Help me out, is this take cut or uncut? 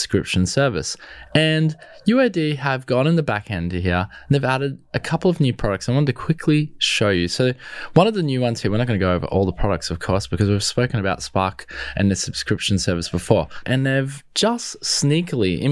cut